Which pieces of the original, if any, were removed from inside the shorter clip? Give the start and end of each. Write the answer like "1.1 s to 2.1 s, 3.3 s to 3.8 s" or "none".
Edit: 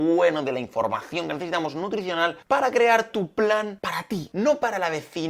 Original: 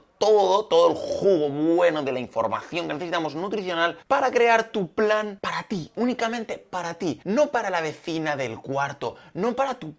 5.9 s to 7.2 s